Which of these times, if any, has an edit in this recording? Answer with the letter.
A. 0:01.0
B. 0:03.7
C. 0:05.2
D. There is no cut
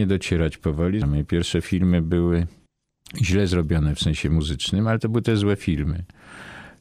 A